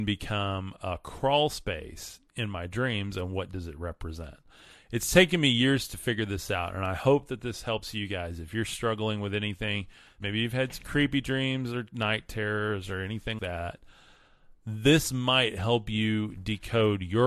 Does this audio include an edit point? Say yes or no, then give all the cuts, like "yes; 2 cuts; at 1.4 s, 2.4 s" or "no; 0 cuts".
yes; 2 cuts; at 10.2 s, 13.4 s